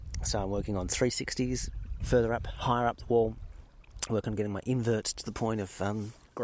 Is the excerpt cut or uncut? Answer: cut